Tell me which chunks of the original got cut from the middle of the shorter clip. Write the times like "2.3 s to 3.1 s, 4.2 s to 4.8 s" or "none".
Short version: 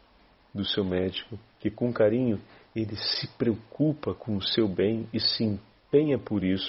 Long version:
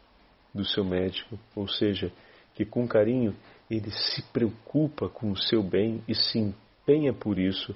1.5 s to 2.4 s